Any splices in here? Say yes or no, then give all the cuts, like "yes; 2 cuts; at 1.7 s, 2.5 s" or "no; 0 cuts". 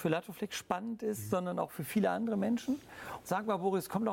yes; 1 cut; at 3.2 s